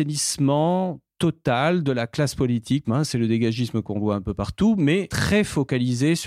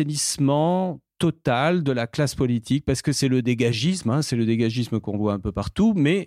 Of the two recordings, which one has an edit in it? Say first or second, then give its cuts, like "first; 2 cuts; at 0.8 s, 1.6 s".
first; 1 cut; at 2.8 s